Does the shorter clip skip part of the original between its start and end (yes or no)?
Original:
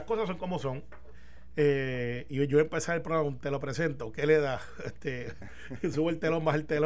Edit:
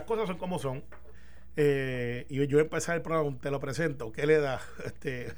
no